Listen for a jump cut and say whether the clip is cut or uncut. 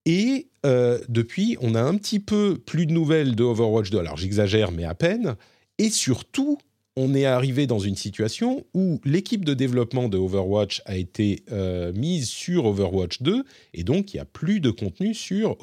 uncut